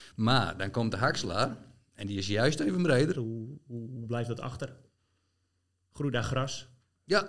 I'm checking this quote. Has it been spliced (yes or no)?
yes